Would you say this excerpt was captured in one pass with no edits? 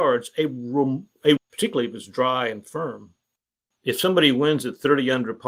no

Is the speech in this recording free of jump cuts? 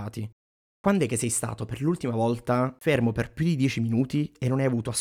yes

